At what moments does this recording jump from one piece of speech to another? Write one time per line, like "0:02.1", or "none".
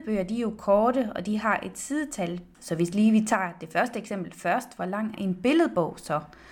0:02.5
0:05.2

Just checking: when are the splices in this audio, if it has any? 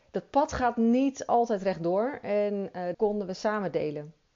0:02.9

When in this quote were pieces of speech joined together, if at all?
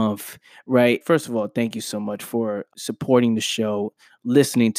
0:01.0
0:02.7

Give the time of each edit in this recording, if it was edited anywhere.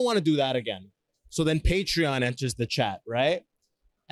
none

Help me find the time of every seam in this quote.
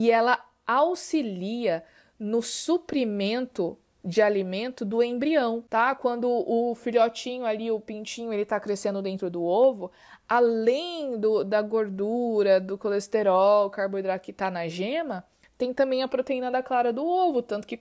none

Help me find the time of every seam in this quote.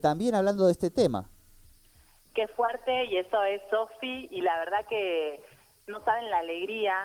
0:04.3

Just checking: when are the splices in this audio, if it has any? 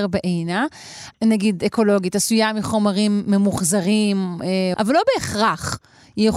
0:01.1
0:04.7

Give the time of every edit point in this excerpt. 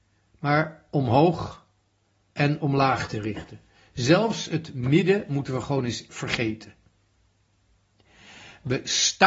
0:06.1

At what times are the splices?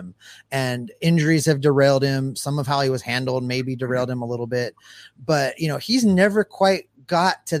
none

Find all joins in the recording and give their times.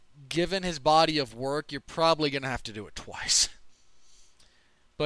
none

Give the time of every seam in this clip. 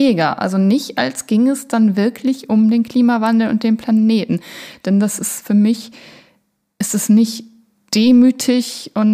none

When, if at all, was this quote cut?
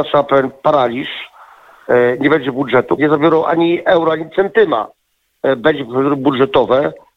0:03.0

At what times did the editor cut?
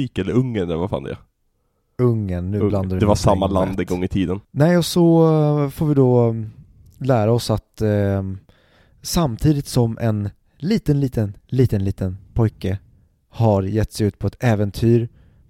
0:03.0

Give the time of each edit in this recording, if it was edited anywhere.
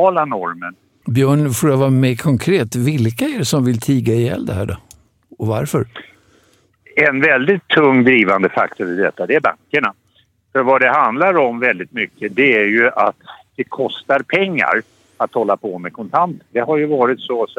0:01.0

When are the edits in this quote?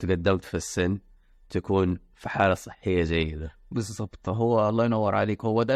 none

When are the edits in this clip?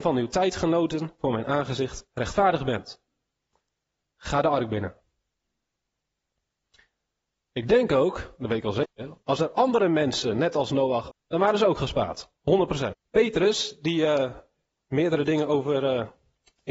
0:11.1
0:12.9

